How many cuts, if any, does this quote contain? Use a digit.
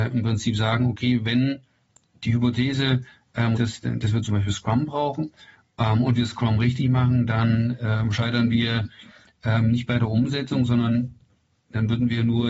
1